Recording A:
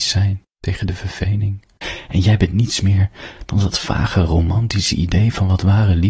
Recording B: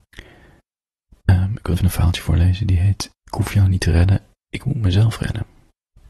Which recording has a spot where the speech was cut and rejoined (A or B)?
B